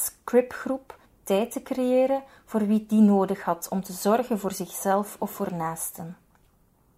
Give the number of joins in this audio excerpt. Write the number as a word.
one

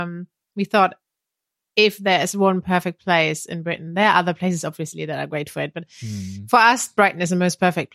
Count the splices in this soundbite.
zero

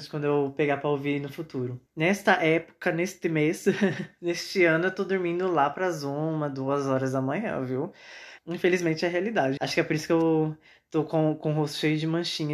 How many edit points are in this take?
three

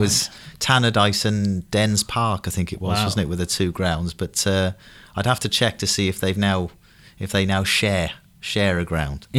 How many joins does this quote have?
zero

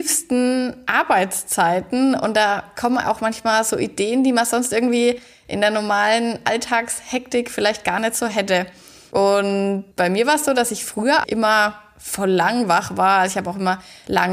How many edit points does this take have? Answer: one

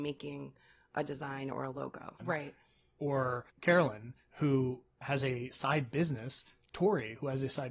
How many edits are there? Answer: two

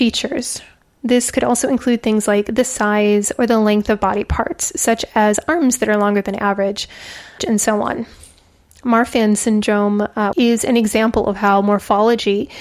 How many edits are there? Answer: two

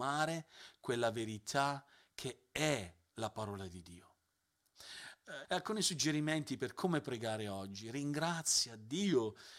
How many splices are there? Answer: one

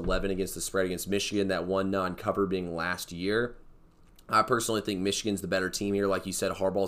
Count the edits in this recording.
zero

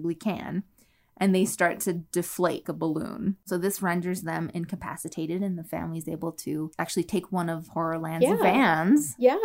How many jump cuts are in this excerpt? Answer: one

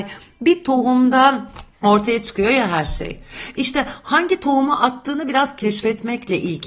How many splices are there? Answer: one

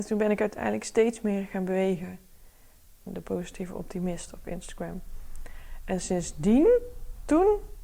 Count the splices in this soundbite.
one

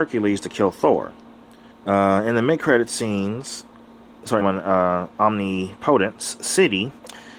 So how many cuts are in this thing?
two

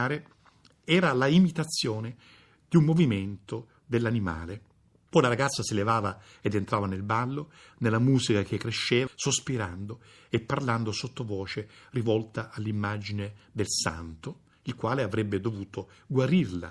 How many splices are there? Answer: one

